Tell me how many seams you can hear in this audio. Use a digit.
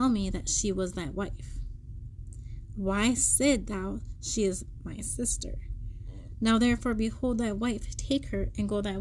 1